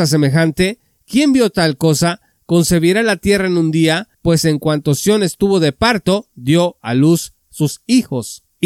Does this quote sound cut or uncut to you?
cut